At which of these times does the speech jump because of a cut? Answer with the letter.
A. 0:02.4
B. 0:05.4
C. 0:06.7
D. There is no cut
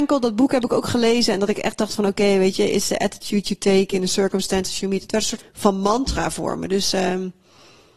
B